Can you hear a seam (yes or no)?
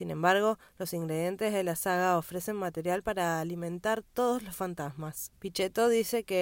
yes